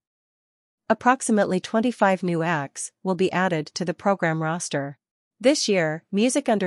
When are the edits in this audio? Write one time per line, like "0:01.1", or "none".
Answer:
0:05.3